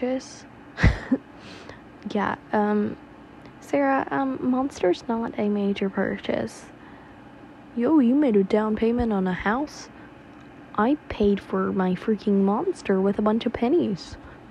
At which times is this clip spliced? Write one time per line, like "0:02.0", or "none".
none